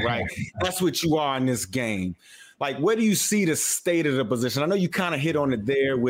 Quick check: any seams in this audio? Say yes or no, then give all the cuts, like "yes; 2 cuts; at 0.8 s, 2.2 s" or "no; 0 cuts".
no; 0 cuts